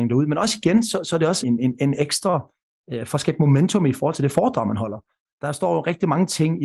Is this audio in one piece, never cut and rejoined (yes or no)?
no